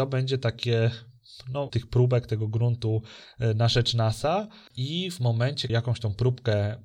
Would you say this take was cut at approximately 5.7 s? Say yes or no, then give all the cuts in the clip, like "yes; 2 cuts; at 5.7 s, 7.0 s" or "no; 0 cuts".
yes; 3 cuts; at 1.7 s, 4.7 s, 5.7 s